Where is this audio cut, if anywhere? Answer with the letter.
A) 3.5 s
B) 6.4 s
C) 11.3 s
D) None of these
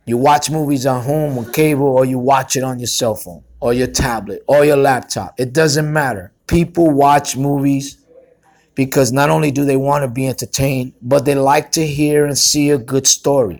B